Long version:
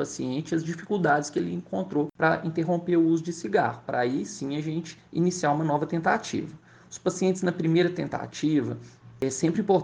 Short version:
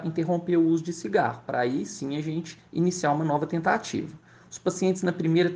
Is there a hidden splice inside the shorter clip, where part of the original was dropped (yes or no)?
no